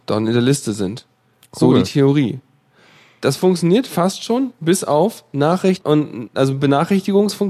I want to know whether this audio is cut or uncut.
cut